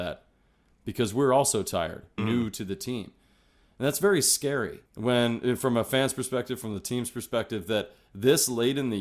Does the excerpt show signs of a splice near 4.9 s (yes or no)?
yes